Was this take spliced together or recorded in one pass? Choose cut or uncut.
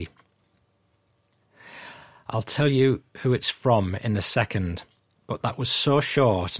uncut